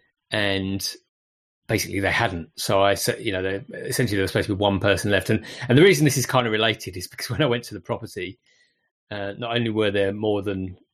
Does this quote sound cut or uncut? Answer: uncut